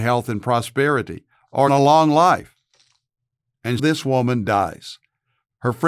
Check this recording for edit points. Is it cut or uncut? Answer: cut